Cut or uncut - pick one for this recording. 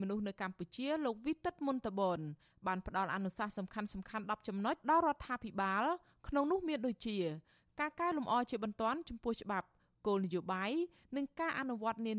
cut